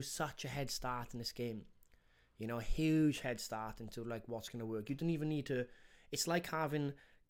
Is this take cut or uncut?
uncut